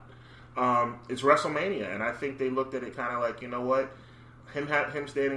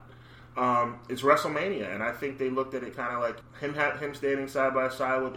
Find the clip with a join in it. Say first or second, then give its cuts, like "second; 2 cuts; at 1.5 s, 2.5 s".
second; 1 cut; at 3.4 s